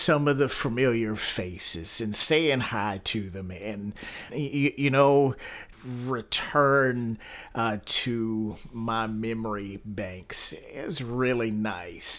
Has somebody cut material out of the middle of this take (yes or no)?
yes